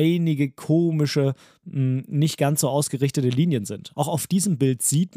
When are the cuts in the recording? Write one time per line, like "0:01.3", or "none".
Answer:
0:03.9